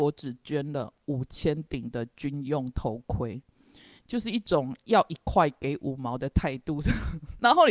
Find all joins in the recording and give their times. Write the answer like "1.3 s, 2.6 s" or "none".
none